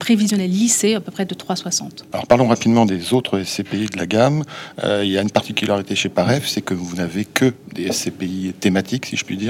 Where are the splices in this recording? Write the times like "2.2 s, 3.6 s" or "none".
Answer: 2.1 s